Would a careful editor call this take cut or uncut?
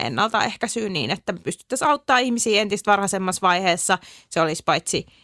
uncut